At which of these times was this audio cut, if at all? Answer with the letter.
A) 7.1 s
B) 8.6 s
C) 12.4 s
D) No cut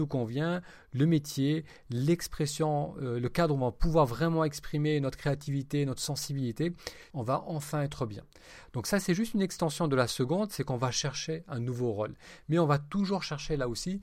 A